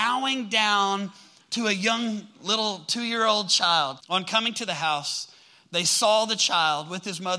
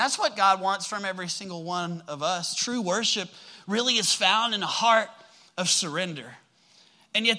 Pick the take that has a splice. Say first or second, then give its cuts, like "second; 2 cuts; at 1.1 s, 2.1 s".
first; 1 cut; at 4.0 s